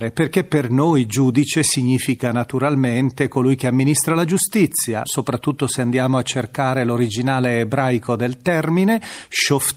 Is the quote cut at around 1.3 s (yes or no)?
no